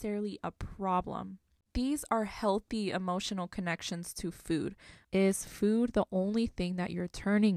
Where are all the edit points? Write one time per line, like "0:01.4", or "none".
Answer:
0:05.0